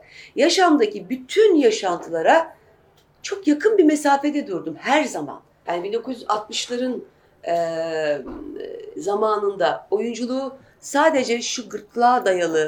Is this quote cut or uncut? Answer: cut